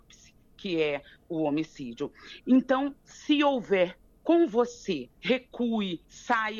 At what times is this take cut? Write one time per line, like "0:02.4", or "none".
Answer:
0:05.1